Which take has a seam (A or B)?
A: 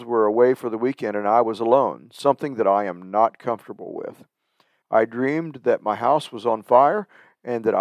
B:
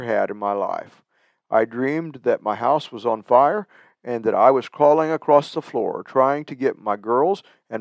A